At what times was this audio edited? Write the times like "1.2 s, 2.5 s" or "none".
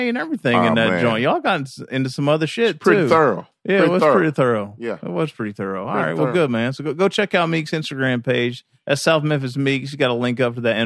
none